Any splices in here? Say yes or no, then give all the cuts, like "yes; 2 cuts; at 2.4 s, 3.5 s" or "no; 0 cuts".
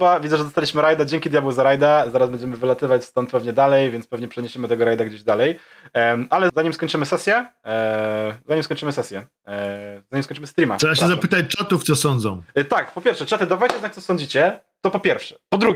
yes; 1 cut; at 6.5 s